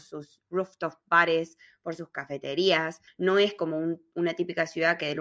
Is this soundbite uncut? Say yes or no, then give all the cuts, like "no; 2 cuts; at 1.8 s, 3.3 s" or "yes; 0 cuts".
no; 1 cut; at 3.1 s